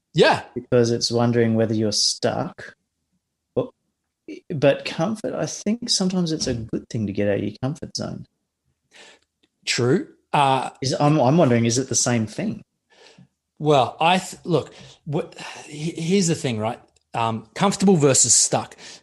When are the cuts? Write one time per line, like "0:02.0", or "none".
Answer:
none